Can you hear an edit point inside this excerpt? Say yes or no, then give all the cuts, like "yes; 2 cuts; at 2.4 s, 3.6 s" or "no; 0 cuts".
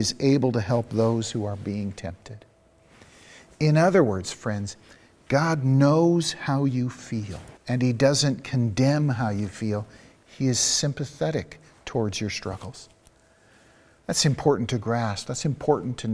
yes; 1 cut; at 7.6 s